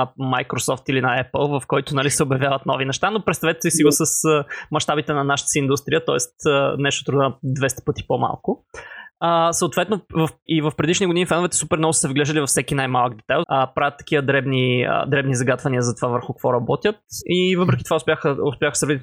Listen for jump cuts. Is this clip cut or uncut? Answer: cut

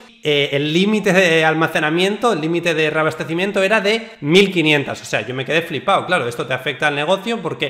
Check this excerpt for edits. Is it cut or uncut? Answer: uncut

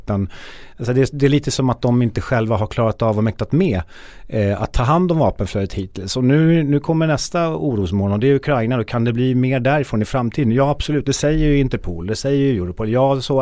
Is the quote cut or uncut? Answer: uncut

